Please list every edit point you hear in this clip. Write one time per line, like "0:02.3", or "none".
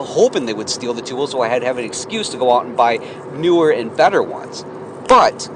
none

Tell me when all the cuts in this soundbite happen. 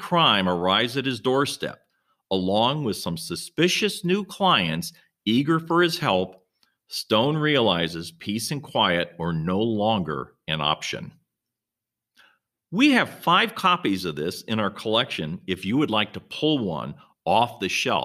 none

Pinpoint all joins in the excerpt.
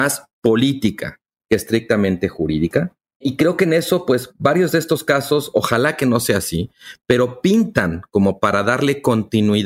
none

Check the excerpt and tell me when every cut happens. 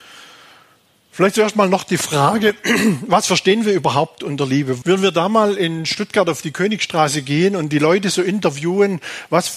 0:04.8

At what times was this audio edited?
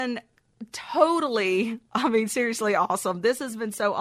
none

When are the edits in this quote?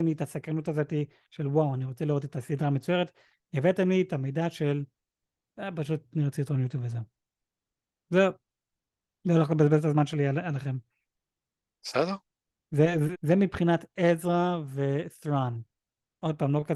0:13.1

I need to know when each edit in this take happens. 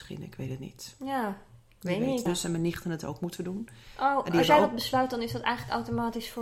0:02.3

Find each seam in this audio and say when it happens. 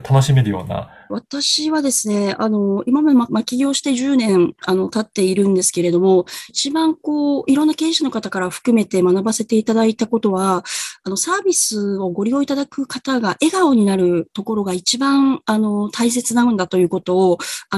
0:01.1
0:03.3
0:06.5

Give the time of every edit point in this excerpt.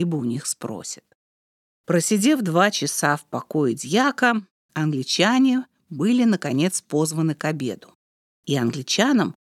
0:08.3

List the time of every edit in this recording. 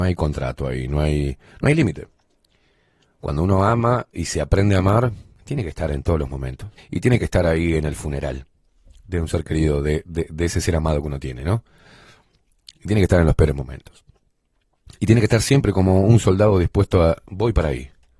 0:06.8

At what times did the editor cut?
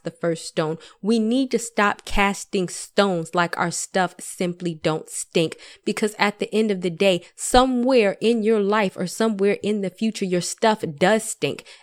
none

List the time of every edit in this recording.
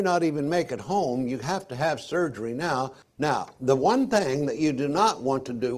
0:03.0

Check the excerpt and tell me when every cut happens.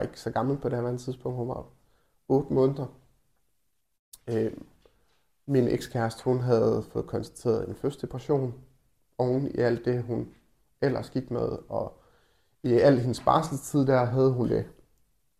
none

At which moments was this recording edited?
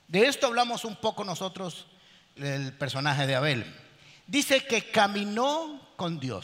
0:02.4

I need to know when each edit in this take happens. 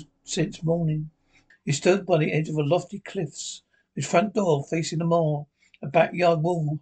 0:01.5

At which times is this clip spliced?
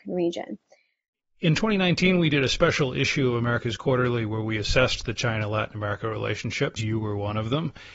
0:06.8

